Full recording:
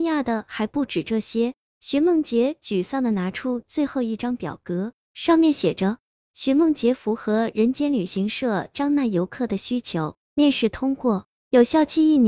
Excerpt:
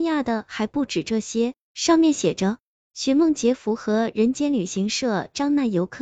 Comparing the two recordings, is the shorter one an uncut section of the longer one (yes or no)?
no